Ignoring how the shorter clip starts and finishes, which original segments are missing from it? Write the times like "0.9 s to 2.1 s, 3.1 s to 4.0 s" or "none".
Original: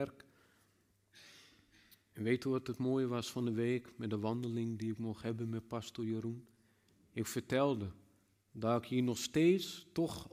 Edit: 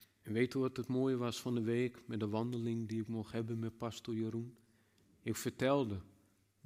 none